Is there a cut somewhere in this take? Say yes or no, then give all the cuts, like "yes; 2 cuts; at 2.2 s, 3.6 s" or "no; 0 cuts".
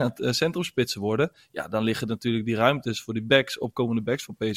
no; 0 cuts